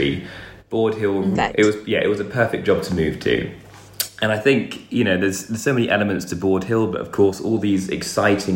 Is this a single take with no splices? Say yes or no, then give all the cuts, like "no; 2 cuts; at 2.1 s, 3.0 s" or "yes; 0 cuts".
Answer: no; 1 cut; at 1.4 s